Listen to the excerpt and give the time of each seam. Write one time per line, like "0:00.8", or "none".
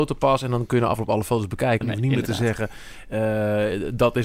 0:01.8